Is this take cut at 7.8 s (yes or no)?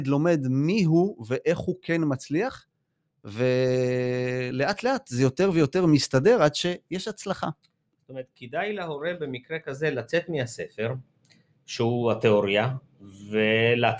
no